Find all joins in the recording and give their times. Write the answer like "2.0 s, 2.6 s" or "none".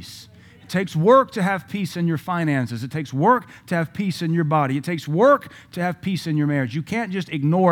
none